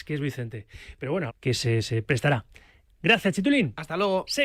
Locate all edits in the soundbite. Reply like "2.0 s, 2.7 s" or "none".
1.3 s

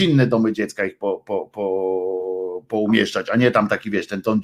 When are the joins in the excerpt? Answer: none

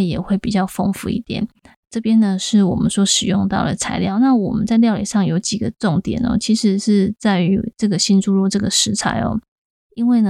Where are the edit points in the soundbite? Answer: none

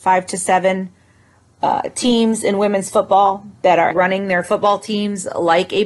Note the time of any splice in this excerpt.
3.9 s

